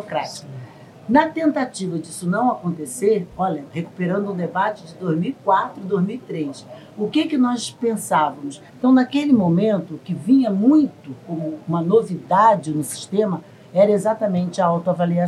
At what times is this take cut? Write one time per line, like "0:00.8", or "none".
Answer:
0:08.7